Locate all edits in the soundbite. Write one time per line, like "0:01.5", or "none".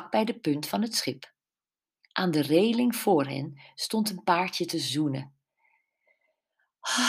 none